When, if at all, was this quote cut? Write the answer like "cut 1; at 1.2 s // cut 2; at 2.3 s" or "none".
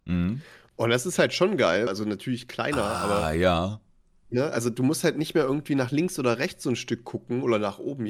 cut 1; at 1.9 s